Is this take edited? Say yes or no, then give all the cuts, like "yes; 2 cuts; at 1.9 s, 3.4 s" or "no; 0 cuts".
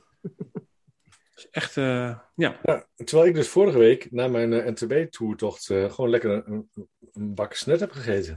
no; 0 cuts